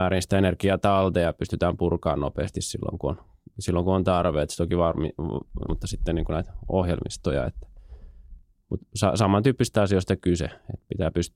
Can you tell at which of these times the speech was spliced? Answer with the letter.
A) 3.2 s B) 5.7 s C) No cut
B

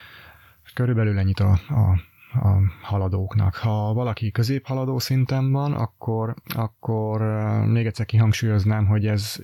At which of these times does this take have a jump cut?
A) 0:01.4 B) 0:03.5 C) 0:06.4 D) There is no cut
C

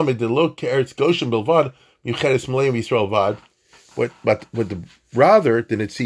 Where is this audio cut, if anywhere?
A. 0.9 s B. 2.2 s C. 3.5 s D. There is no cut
D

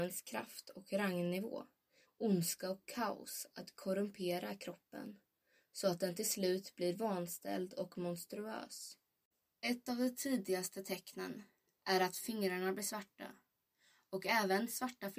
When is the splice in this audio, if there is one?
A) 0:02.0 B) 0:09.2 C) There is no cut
A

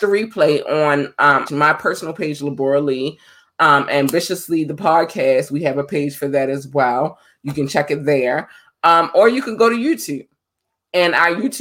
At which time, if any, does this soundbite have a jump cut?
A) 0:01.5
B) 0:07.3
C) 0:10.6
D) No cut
A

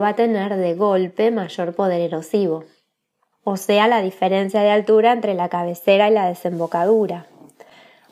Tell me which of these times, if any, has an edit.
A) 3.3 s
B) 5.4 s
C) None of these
A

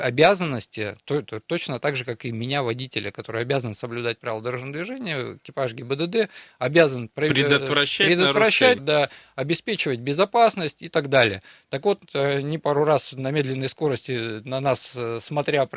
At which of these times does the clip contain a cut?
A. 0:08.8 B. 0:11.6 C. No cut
A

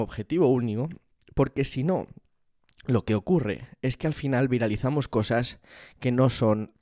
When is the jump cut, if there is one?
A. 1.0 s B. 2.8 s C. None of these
C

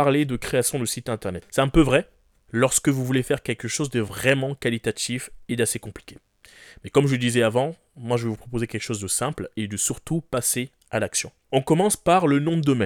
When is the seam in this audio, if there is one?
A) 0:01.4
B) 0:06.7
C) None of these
A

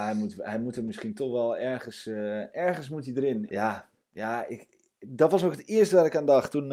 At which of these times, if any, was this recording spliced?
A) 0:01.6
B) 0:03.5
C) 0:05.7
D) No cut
B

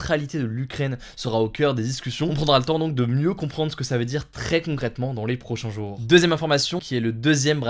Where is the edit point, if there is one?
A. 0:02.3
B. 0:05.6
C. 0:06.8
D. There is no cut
C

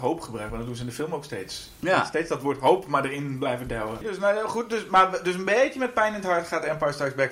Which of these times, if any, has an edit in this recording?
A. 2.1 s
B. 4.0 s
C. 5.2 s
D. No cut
B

